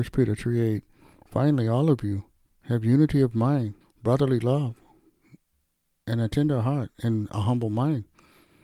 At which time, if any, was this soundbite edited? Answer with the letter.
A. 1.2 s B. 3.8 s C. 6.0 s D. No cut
B